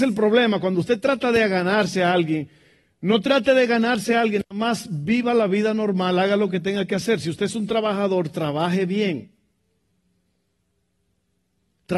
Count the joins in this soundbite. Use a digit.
0